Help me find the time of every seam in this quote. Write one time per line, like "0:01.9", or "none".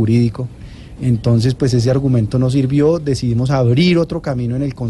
0:01.0